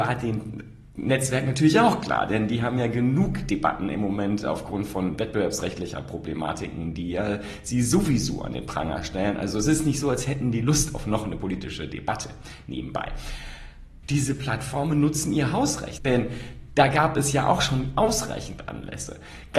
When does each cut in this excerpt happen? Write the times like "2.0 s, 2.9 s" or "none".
14.0 s, 16.0 s